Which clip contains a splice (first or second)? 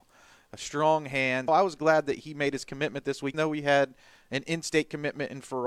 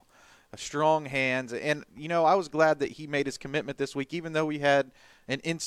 first